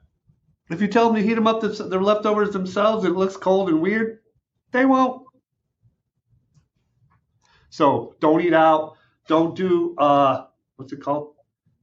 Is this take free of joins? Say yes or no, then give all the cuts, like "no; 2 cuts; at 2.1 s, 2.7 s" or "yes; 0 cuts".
yes; 0 cuts